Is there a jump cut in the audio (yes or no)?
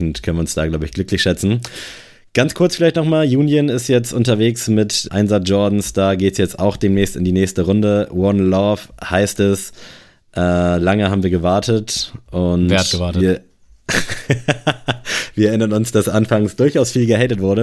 yes